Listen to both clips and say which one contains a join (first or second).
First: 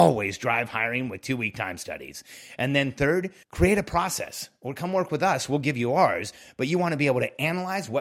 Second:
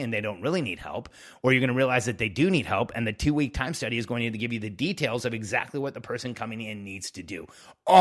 first